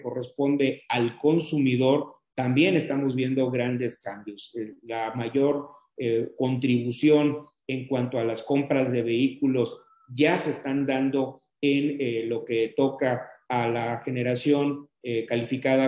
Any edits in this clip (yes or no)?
no